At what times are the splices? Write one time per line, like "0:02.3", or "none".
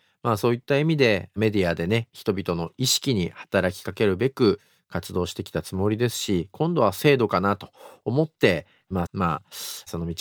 0:09.1